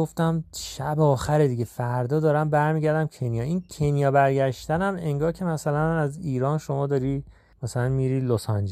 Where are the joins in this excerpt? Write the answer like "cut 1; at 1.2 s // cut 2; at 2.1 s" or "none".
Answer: none